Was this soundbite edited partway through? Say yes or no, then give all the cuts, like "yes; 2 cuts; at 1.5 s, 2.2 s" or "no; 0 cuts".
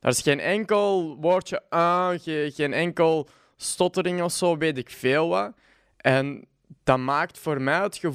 no; 0 cuts